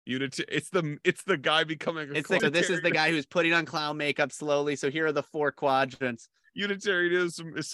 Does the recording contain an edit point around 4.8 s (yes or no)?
no